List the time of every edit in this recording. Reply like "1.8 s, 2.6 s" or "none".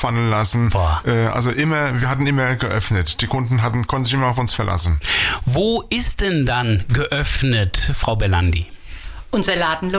none